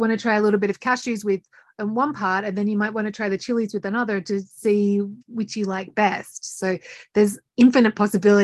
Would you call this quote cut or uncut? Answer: cut